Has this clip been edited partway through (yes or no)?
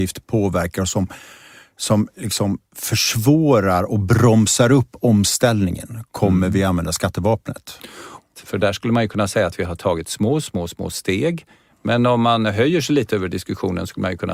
yes